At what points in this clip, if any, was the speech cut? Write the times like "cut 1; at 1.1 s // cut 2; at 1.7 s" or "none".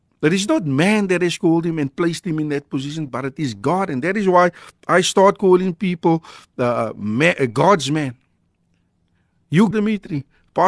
cut 1; at 9.7 s